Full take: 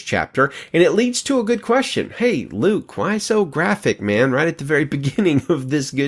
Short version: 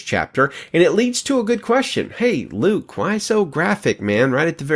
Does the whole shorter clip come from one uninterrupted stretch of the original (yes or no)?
yes